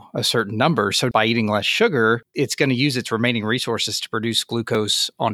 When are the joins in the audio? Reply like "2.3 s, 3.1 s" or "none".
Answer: 1.1 s